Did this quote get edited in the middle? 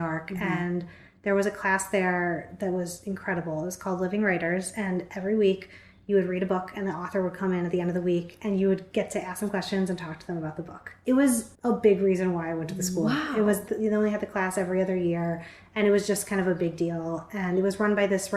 yes; 1 cut; at 11.5 s

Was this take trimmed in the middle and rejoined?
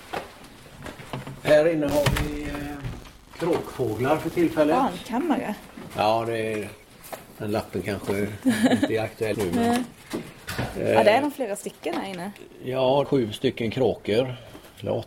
yes; 2 cuts; at 9.3 s, 13.0 s

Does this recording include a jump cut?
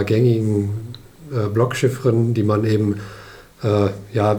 no; 0 cuts

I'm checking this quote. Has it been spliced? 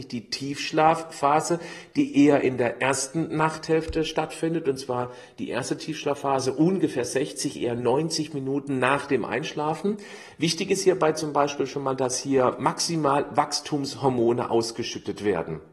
no; 0 cuts

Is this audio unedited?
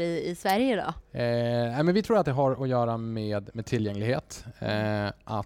yes; 0 cuts

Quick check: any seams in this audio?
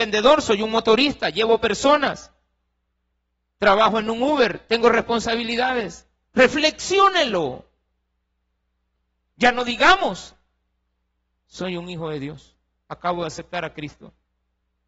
yes; 1 cut; at 6.3 s

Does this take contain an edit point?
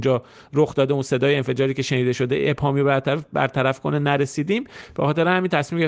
no; 0 cuts

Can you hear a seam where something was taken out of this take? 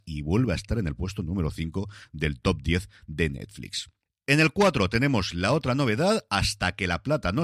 no; 0 cuts

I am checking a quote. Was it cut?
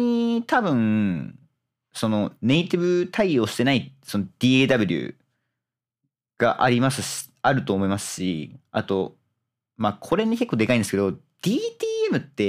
no; 0 cuts

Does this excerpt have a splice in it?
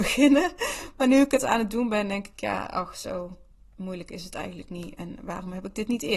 no; 0 cuts

